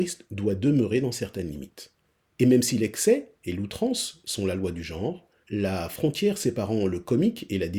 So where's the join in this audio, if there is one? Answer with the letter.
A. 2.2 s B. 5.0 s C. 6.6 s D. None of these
D